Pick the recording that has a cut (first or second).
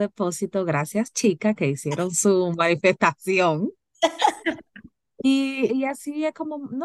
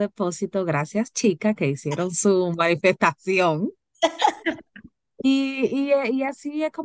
first